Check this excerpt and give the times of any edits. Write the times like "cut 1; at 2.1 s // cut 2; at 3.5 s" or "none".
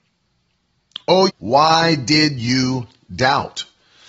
cut 1; at 1.3 s